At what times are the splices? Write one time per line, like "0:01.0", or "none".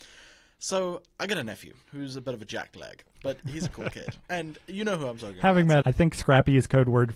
0:01.8
0:03.7
0:05.8